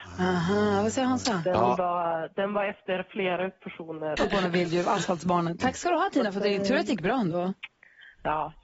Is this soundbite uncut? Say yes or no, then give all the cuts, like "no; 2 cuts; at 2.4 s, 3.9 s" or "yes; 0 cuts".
no; 2 cuts; at 4.2 s, 5.6 s